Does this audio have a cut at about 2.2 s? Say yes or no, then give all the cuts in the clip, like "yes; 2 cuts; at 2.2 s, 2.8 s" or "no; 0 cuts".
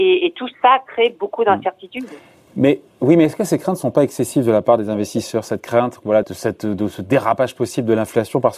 no; 1 cut; at 6.2 s